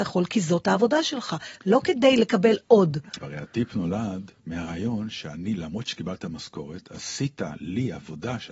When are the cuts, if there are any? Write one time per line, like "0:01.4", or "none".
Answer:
0:03.2
0:04.4